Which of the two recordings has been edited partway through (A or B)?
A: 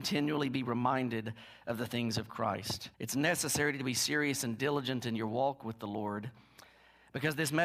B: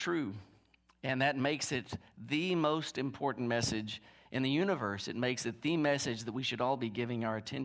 A